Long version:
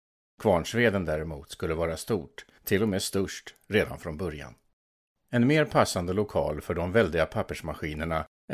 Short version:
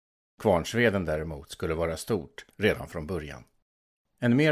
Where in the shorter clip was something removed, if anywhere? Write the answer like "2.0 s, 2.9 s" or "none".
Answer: 2.5 s